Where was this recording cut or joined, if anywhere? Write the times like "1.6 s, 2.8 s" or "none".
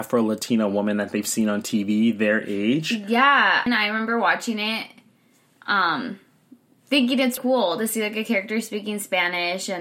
3.7 s, 7.4 s